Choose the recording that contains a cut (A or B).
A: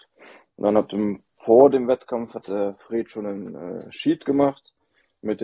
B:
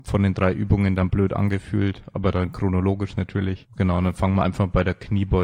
B